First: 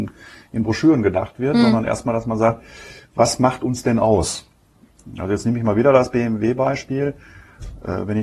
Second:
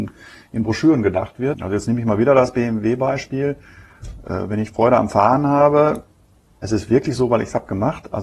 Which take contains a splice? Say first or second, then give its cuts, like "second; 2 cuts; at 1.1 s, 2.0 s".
second; 1 cut; at 1.5 s